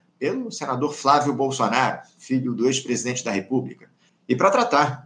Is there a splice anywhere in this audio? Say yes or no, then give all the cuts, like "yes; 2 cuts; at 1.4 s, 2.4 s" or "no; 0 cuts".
yes; 1 cut; at 4.1 s